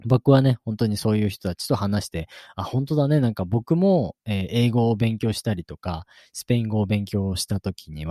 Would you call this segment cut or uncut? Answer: uncut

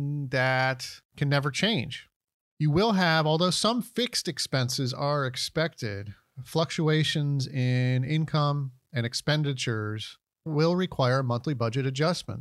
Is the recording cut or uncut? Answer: uncut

